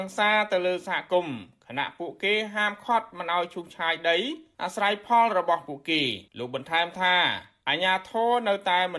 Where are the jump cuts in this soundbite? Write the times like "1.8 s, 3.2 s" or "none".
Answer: 6.3 s